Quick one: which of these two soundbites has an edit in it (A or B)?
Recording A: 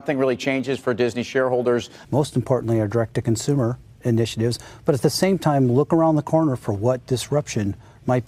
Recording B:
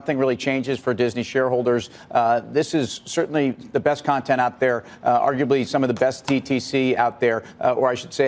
A